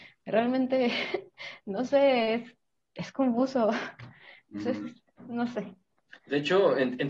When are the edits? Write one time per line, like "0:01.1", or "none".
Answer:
none